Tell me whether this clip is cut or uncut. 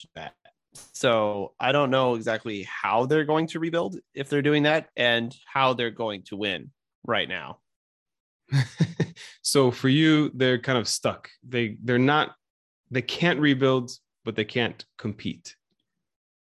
uncut